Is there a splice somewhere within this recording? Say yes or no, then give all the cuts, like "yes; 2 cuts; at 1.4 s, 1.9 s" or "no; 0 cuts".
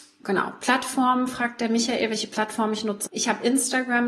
yes; 1 cut; at 3.1 s